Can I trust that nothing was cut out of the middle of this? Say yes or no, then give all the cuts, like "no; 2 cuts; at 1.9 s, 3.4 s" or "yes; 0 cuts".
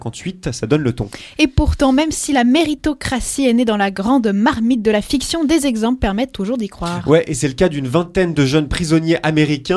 yes; 0 cuts